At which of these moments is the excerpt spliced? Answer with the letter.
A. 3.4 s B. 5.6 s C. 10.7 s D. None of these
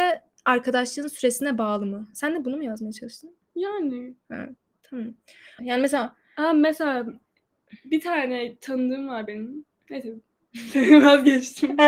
B